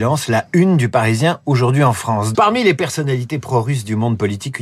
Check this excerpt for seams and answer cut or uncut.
cut